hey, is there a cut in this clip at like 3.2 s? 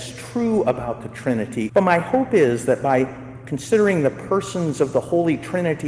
no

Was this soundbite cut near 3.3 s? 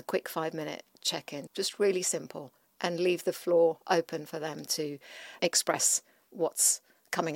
no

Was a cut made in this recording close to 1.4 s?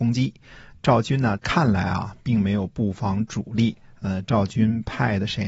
yes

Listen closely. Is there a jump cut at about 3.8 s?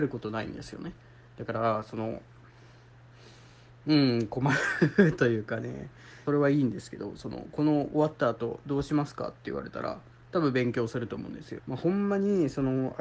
no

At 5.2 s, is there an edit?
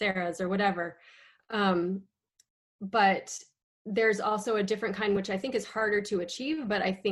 no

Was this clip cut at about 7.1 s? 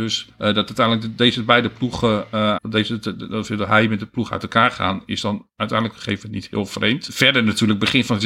no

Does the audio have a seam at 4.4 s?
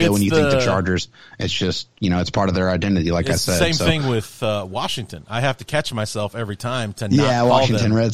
no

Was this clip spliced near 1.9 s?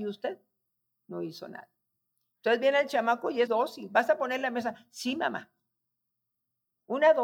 no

